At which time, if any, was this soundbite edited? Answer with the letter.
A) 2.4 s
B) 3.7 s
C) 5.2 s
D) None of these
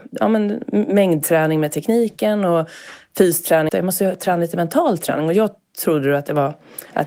B